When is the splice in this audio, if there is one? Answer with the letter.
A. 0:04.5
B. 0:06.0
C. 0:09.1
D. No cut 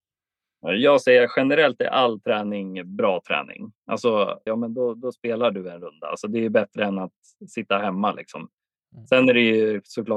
A